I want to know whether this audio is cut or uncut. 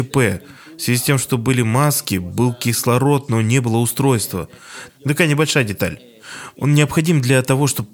cut